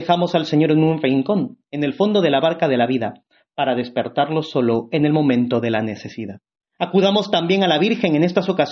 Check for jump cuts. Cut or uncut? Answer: cut